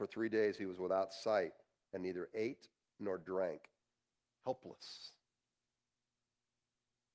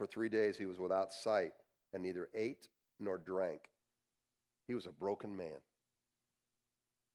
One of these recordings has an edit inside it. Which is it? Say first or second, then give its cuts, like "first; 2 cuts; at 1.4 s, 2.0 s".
first; 1 cut; at 4.3 s